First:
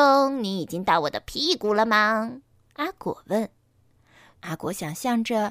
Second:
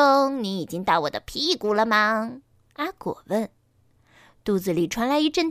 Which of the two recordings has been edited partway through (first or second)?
first